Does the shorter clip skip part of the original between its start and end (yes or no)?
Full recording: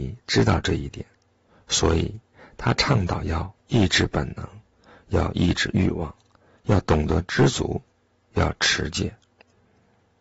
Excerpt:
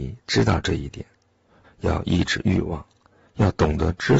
yes